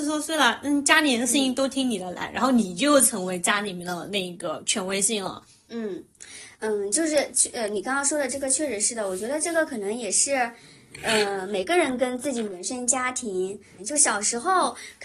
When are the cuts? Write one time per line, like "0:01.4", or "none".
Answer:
0:13.8